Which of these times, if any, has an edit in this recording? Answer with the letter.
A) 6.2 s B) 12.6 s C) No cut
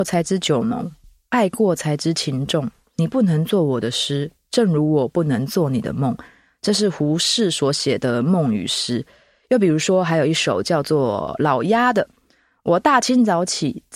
C